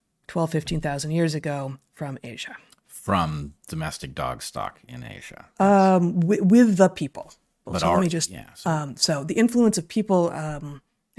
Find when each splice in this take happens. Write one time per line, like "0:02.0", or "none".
0:07.7

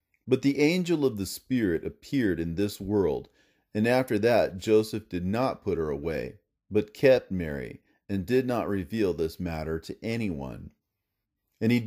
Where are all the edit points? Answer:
none

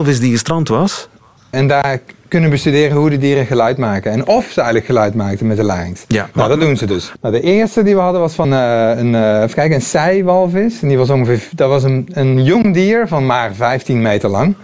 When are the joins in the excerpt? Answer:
0:01.5
0:07.2
0:08.4

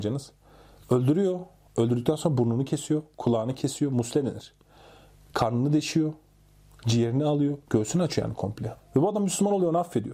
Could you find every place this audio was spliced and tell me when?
0:07.7
0:08.8

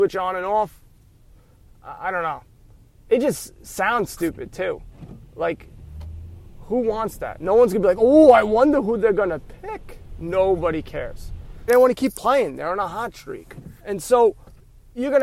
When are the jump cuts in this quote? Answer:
0:11.7
0:13.8

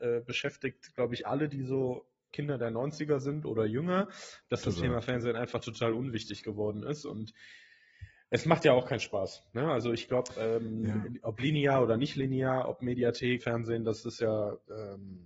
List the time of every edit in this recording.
0:02.3
0:13.4

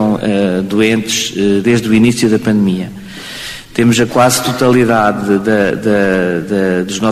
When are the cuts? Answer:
0:01.6

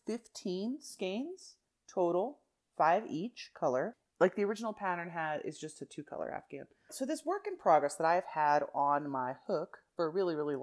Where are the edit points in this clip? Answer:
0:06.9

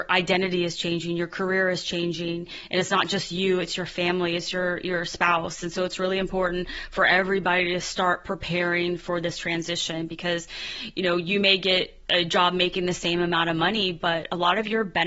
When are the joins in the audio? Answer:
0:12.0

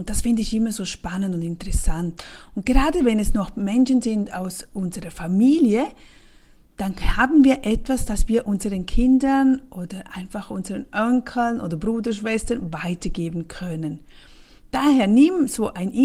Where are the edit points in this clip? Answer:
none

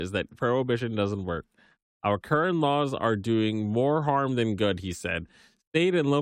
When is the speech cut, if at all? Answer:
none

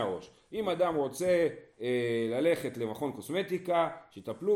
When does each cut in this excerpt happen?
none

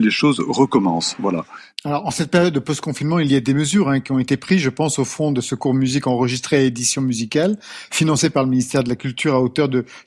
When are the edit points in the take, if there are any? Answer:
none

